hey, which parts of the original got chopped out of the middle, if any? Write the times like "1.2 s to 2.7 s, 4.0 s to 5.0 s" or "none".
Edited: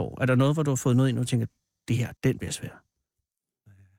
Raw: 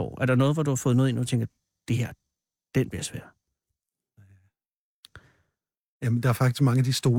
2.2 s to 2.7 s